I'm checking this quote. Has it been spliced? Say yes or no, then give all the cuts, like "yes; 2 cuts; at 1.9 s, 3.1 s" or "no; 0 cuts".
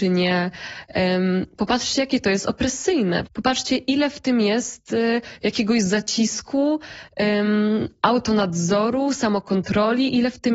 no; 0 cuts